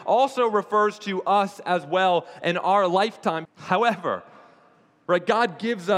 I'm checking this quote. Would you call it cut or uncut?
cut